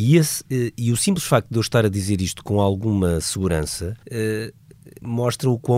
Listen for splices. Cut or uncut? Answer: cut